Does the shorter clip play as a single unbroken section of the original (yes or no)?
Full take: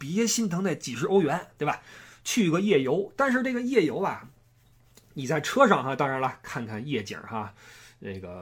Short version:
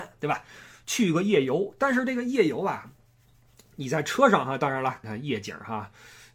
no